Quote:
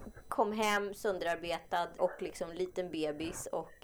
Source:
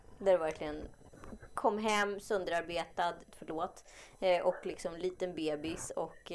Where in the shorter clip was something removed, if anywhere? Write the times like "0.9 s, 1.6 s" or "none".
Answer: 2.0 s